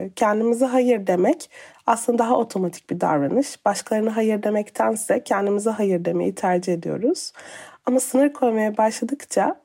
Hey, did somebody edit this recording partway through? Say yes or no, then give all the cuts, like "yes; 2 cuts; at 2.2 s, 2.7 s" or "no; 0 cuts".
no; 0 cuts